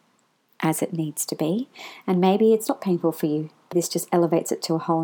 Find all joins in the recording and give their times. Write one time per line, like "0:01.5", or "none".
0:03.7

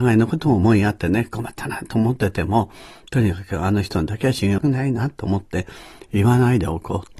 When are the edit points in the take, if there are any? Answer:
0:04.6

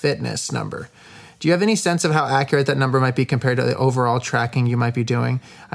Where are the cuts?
none

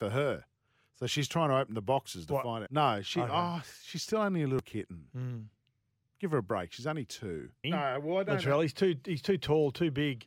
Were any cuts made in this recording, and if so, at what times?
0:02.7
0:07.6

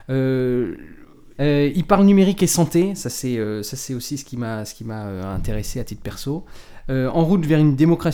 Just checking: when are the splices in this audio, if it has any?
0:01.4
0:06.8

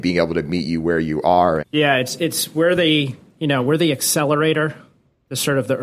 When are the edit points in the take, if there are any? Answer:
0:01.6

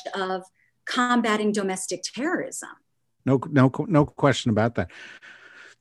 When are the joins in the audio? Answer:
0:03.2

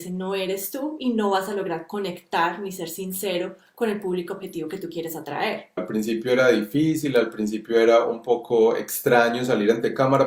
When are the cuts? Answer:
0:05.8

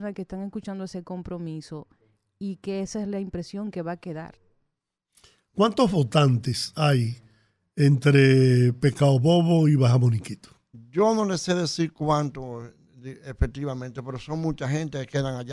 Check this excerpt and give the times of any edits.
none

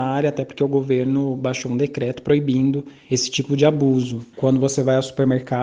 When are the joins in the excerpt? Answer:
0:04.3

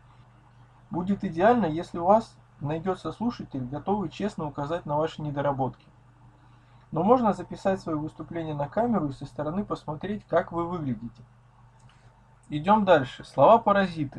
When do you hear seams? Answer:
none

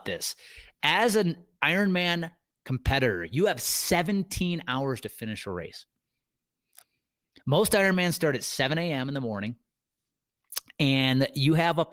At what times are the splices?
none

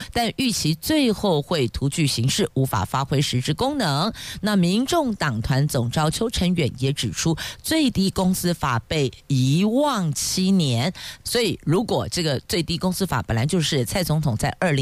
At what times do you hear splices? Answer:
0:04.4
0:11.2

